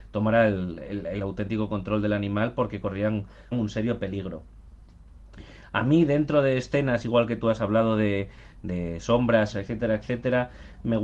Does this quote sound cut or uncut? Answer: cut